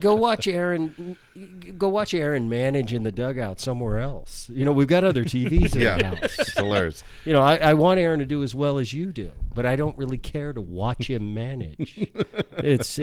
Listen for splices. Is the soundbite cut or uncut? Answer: uncut